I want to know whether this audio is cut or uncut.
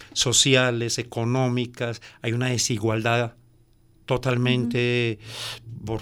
uncut